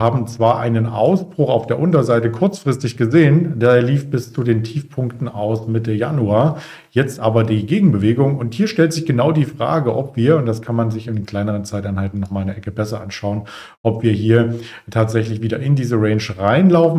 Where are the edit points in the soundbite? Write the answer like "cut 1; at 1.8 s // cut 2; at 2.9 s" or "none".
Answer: none